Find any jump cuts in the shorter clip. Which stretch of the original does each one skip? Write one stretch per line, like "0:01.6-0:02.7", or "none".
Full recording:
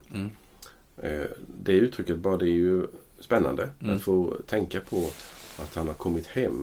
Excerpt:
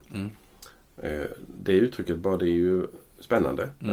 none

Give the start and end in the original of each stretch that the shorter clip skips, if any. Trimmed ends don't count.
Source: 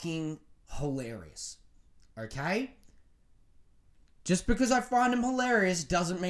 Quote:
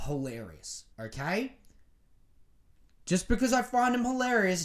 0:01.6-0:02.1

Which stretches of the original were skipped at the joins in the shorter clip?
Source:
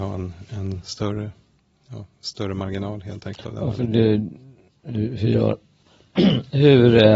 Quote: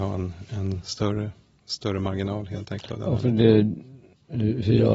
0:01.6-0:02.2

